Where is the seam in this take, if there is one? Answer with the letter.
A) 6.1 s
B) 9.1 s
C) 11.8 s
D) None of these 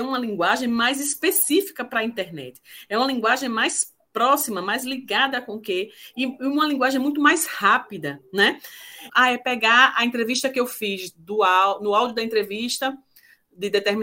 B